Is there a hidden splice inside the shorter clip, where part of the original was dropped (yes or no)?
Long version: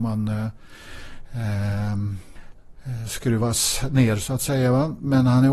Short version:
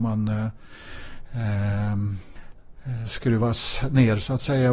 no